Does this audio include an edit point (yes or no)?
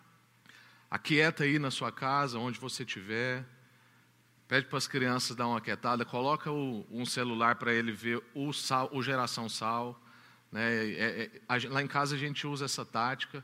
no